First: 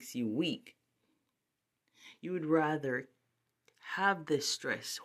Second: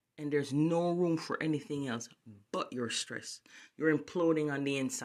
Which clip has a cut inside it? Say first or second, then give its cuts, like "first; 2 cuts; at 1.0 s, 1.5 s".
second; 1 cut; at 3.7 s